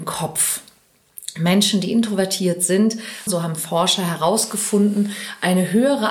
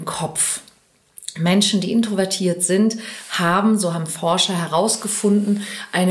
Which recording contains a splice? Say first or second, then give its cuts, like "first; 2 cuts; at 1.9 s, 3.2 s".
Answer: first; 1 cut; at 3.3 s